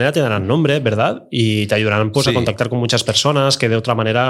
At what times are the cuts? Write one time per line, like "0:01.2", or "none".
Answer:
none